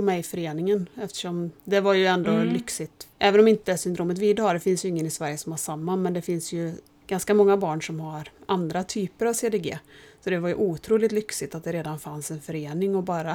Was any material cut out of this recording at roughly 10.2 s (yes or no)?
no